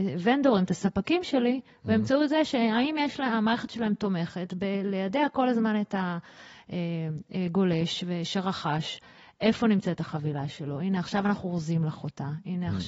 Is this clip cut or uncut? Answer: uncut